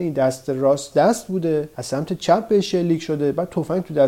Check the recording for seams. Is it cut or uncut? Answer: cut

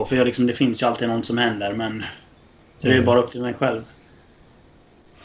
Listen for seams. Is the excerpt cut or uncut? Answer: uncut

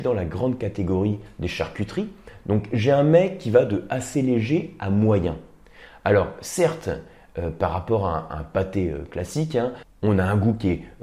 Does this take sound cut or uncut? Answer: uncut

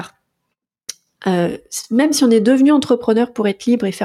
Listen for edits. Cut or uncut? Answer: uncut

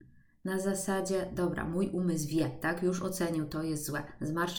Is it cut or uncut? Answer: uncut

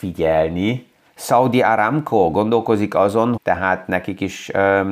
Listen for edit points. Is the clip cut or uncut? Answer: cut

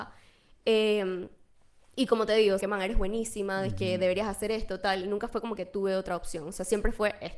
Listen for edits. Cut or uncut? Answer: cut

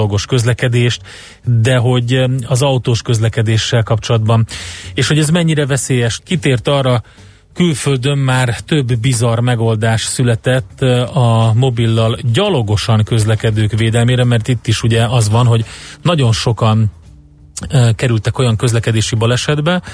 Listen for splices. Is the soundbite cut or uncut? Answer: cut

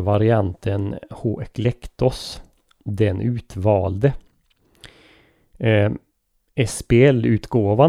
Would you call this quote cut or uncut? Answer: uncut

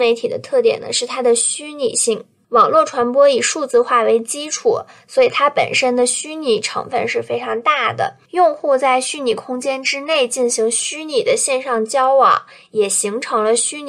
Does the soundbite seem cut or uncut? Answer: uncut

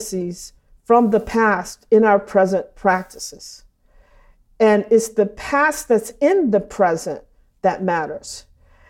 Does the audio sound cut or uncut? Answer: uncut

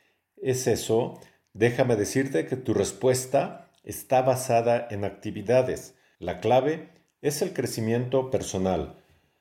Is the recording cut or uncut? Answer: cut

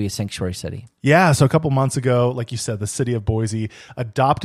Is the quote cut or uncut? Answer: uncut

